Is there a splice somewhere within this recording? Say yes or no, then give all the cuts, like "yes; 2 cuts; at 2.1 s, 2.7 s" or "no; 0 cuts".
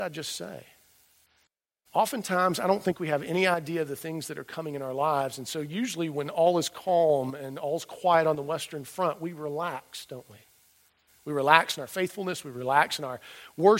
no; 0 cuts